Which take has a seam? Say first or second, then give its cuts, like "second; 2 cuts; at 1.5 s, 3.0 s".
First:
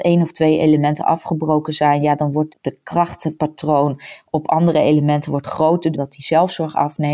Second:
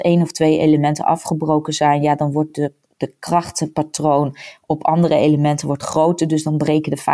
first; 2 cuts; at 2.5 s, 5.9 s